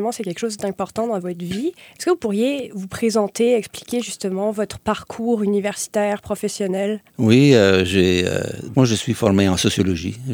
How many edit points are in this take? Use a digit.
2